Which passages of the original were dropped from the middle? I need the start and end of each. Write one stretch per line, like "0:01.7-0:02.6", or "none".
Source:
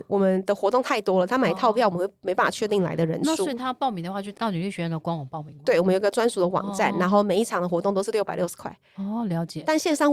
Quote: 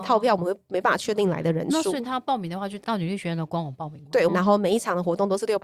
0:05.8-0:06.9